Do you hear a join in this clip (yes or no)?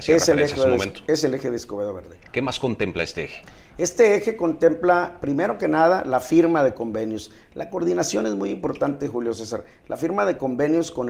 no